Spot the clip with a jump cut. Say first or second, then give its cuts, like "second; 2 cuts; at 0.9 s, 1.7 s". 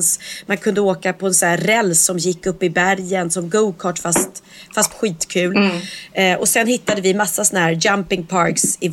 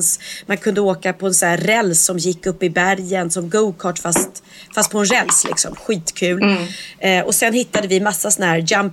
first; 1 cut; at 4.9 s